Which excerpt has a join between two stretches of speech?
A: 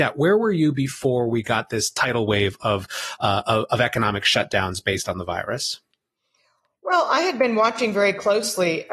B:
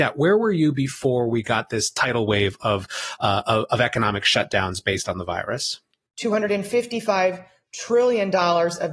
B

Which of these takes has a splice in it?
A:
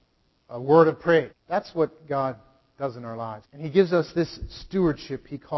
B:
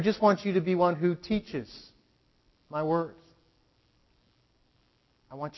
A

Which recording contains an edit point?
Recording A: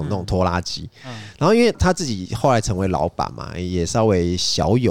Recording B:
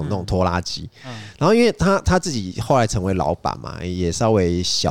A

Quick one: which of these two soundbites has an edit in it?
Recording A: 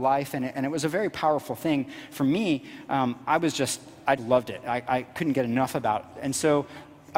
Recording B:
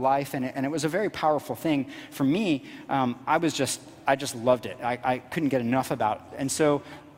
A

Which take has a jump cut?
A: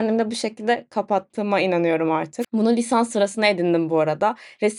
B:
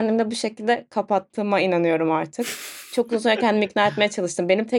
A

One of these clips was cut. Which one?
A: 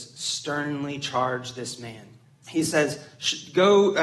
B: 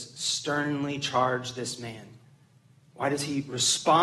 A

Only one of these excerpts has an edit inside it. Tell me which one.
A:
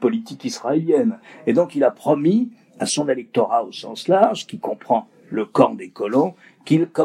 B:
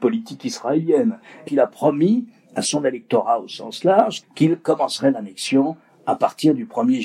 B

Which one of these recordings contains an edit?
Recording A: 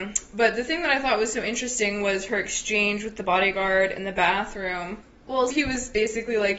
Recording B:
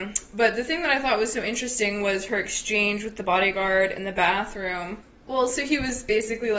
A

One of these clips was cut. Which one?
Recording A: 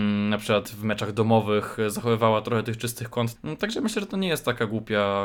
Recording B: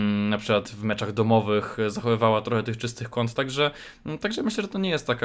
A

